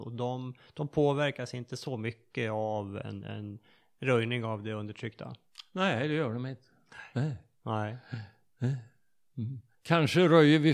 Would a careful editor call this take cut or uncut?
uncut